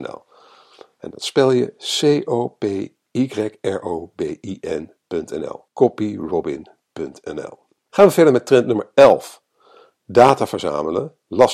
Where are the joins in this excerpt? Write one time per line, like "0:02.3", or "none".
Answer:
0:05.7
0:07.9